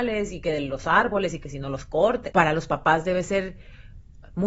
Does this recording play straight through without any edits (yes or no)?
no